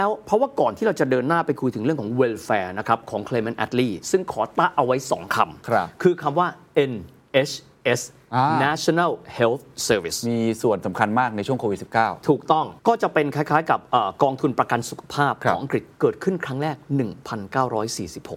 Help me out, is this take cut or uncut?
cut